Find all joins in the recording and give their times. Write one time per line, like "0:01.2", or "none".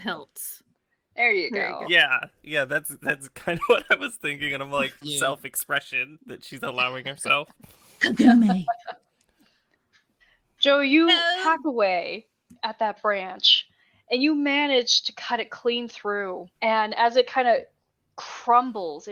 0:05.0
0:16.5